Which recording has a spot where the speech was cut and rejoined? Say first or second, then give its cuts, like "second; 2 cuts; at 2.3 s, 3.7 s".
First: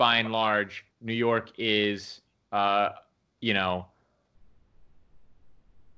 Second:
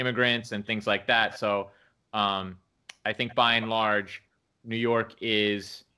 first; 1 cut; at 0.9 s